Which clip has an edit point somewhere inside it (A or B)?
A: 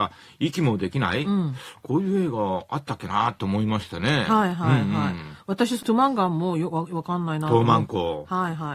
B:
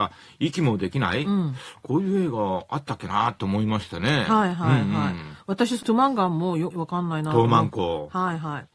B